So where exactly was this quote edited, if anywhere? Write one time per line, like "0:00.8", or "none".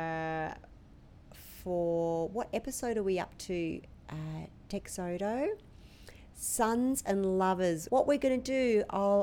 0:07.9